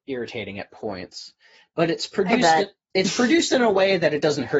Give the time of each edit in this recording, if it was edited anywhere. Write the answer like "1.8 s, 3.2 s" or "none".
none